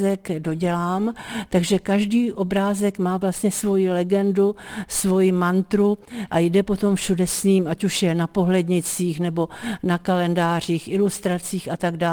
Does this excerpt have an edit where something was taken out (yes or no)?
no